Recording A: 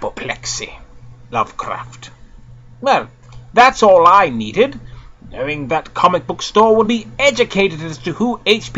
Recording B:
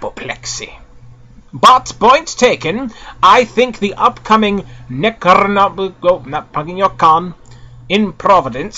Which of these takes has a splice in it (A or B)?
A